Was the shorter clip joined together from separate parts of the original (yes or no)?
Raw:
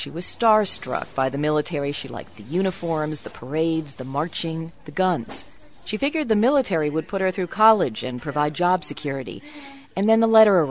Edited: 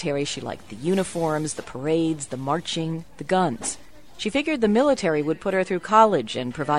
no